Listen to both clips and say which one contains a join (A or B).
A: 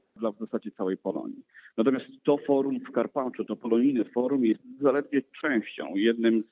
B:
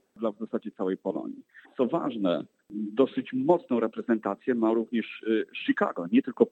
B